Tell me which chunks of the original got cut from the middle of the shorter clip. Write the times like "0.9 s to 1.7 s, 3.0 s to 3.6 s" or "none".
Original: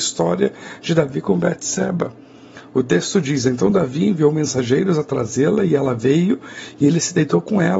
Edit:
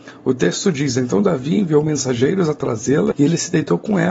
5.6 s to 6.7 s